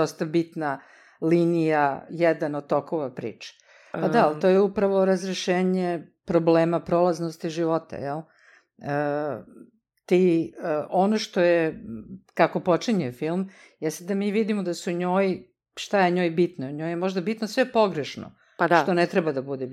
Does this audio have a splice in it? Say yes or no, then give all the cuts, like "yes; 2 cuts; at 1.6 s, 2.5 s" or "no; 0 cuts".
yes; 2 cuts; at 2.1 s, 3.9 s